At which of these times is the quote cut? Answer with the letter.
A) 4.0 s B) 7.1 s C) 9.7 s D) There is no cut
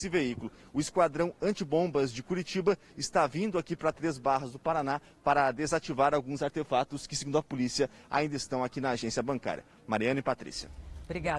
D